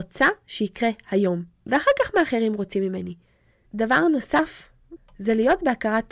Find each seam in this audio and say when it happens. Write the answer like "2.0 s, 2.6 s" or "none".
3.7 s, 5.0 s